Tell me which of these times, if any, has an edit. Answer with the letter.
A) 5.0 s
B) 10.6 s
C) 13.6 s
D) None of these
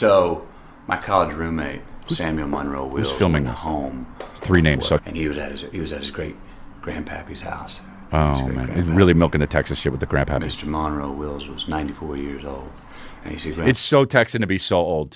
A